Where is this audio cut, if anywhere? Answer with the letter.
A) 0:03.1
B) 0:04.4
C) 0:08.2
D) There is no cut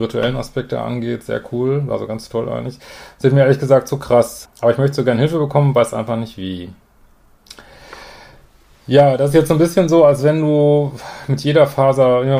B